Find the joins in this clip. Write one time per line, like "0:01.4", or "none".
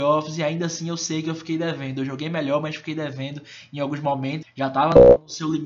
0:04.4